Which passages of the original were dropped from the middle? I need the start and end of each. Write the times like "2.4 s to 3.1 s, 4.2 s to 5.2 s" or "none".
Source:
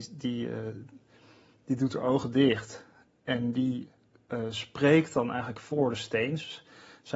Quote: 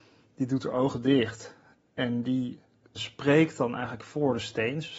4.3 s to 4.5 s

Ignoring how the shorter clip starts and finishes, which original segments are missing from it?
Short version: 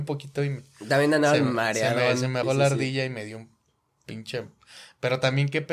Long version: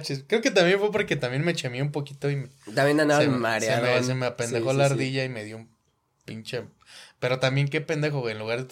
4.3 s to 4.6 s

